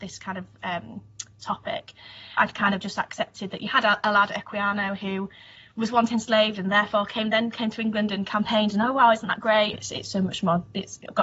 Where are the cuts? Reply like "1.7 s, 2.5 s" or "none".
2.4 s, 9.7 s